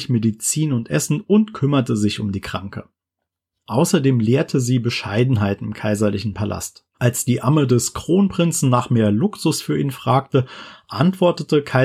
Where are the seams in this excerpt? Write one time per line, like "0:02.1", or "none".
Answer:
0:06.9